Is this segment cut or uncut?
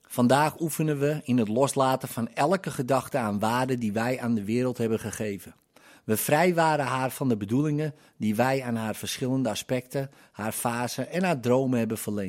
uncut